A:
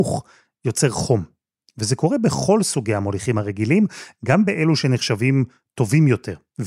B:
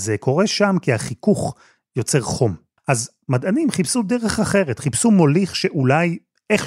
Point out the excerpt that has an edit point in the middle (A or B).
B